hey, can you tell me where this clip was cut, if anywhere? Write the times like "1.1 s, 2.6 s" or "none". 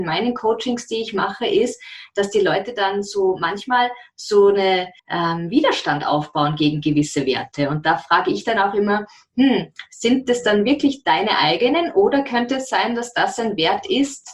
5.0 s